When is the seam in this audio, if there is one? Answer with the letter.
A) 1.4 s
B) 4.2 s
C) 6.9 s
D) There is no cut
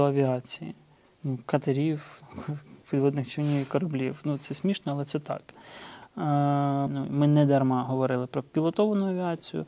C